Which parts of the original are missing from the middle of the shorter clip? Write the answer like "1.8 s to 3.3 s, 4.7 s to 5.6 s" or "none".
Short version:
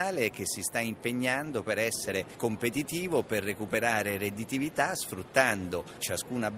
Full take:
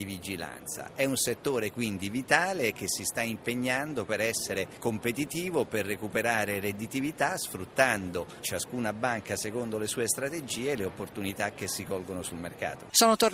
none